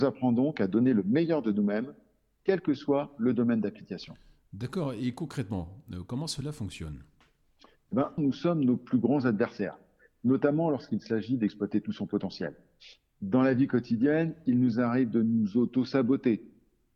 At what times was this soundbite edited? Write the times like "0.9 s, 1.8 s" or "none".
8.2 s